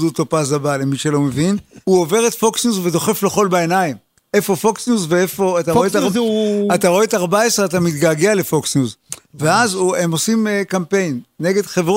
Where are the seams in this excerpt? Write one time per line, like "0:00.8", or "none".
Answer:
0:01.8